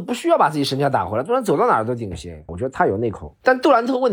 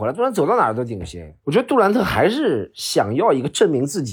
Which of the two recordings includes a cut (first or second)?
first